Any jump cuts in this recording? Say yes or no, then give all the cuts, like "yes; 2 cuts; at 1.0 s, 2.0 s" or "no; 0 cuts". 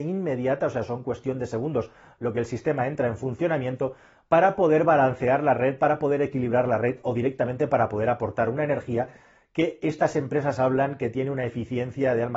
no; 0 cuts